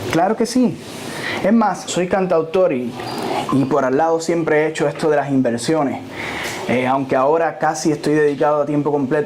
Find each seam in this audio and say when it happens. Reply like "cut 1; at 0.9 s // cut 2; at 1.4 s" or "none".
cut 1; at 1.9 s